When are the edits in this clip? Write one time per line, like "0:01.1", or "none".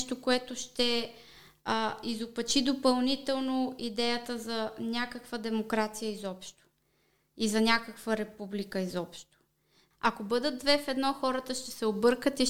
0:09.9